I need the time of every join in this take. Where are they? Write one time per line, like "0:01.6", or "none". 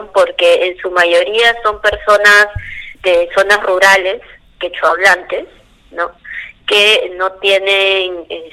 0:02.9

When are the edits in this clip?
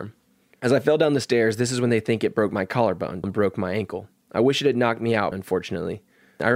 0:03.2
0:05.3

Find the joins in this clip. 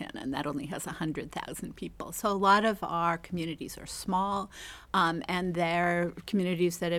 none

